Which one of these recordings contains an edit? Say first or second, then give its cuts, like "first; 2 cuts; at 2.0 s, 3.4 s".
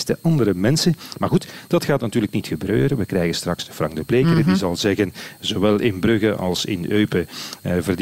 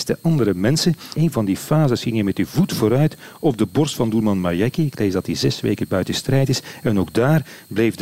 second; 1 cut; at 1.1 s